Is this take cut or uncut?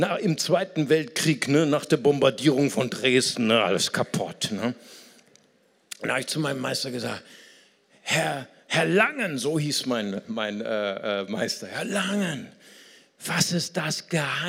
uncut